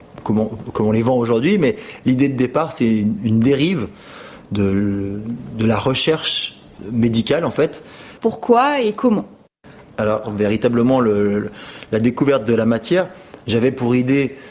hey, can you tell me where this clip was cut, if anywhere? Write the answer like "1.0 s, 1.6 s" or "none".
8.2 s, 10.2 s